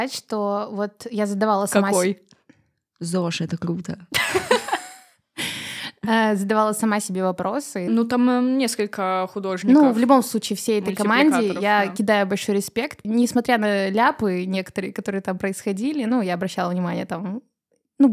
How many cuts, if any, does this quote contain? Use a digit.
2